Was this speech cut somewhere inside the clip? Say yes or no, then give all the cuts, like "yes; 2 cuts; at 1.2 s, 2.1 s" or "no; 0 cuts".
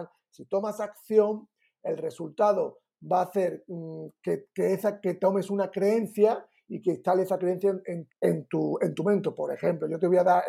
yes; 1 cut; at 8.1 s